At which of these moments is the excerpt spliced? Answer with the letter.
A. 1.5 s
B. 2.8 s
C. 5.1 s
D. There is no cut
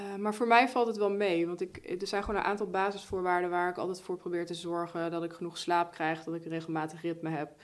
D